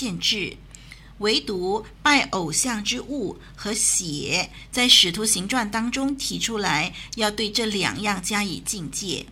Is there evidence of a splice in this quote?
no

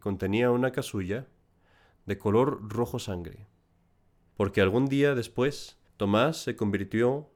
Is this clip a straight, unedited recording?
no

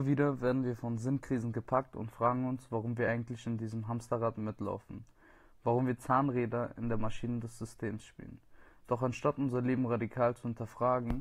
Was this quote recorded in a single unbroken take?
yes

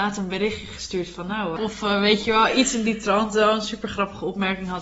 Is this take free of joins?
no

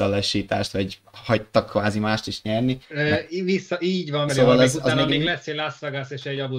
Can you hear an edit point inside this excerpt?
yes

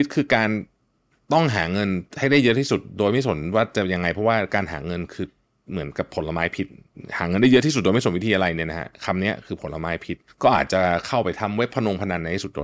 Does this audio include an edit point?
yes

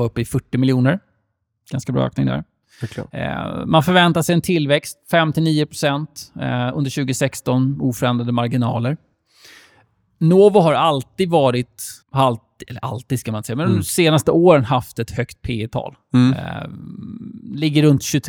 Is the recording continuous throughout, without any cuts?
no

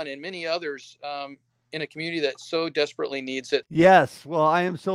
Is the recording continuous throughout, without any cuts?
no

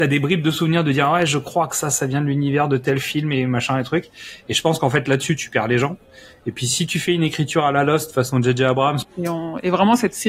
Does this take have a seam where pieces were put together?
yes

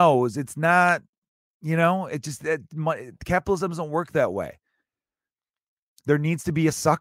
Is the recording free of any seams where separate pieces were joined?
yes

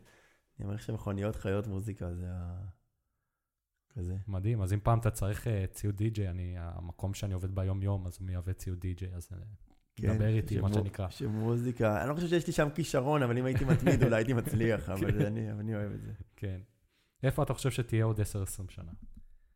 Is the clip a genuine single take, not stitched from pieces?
yes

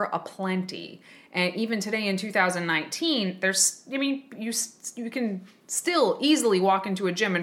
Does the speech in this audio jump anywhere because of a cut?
no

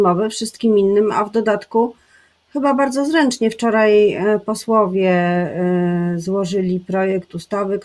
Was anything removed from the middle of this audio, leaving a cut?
no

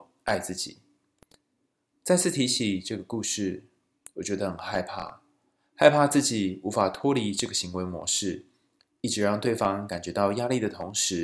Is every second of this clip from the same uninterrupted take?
yes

